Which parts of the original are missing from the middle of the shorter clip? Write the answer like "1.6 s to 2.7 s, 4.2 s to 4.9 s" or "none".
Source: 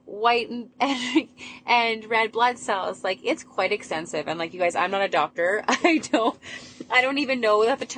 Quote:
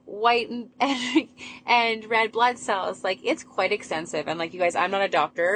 none